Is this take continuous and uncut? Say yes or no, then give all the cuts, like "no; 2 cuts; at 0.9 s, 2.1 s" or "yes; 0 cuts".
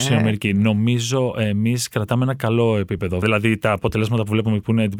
no; 1 cut; at 3.2 s